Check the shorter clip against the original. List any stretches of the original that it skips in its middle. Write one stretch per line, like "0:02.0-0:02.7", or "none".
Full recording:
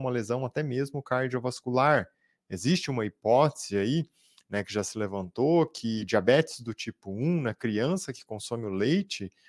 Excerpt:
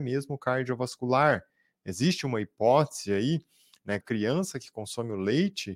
0:04.6-0:07.5